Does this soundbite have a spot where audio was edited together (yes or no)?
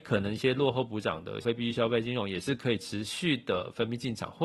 yes